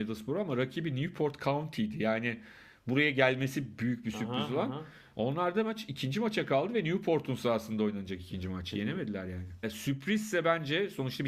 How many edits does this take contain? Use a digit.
1